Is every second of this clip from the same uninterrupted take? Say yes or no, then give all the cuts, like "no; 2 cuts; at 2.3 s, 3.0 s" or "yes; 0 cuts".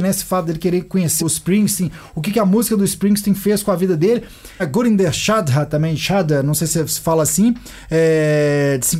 no; 2 cuts; at 1.2 s, 4.6 s